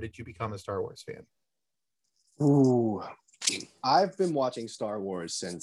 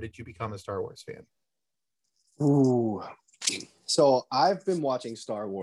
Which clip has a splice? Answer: first; 1 cut; at 3.8 s

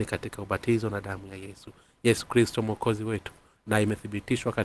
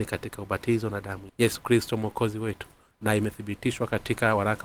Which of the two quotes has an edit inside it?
second; 1 cut; at 1.3 s

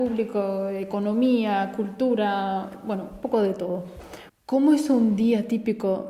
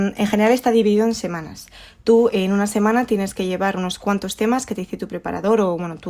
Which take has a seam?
first; 1 cut; at 4.3 s

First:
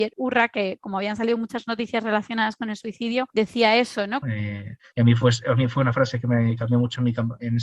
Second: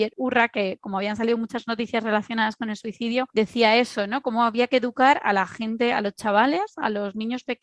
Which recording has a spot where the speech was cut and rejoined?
first; 1 cut; at 4.2 s

